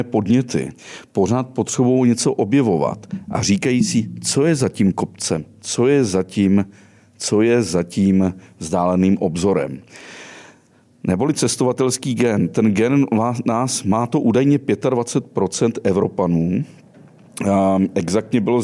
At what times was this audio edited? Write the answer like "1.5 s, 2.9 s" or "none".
none